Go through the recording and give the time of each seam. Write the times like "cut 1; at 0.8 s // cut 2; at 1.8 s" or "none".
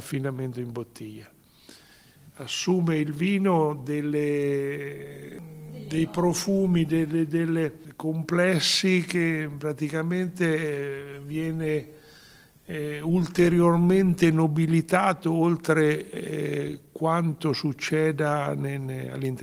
none

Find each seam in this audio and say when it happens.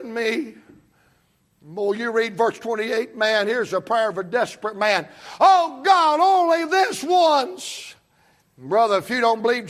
cut 1; at 8.4 s

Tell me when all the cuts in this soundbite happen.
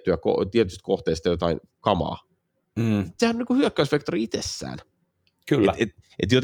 none

